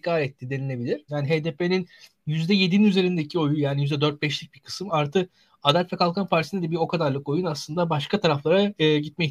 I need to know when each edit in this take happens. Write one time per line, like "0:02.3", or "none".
0:01.1